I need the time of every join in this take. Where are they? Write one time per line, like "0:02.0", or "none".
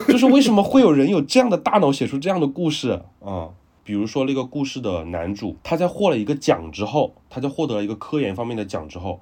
0:03.8
0:07.2